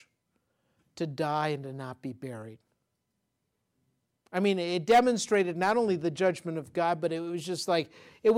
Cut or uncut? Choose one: uncut